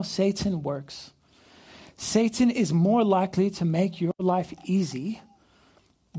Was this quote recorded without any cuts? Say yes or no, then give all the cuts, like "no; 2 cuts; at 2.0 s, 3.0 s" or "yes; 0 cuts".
yes; 0 cuts